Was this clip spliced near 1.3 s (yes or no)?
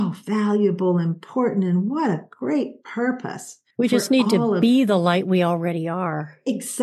no